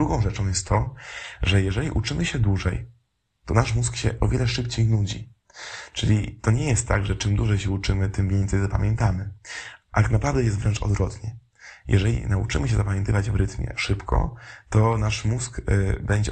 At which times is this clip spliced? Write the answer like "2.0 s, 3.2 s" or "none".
none